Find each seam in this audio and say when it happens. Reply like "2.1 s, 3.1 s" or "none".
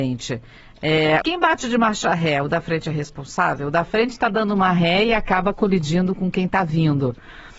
1.2 s